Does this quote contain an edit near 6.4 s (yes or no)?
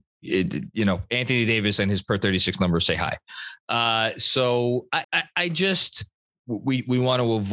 yes